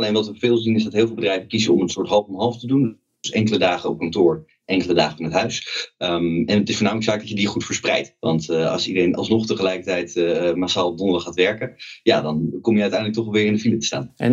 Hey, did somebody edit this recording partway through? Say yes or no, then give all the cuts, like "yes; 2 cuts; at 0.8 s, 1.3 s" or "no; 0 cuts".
no; 0 cuts